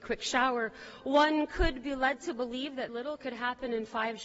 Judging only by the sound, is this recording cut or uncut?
cut